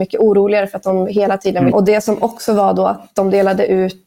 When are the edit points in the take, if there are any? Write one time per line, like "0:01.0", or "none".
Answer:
0:01.7